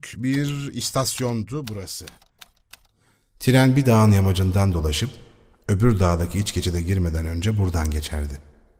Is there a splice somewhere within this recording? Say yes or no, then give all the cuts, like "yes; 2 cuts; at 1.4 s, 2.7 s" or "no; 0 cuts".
no; 0 cuts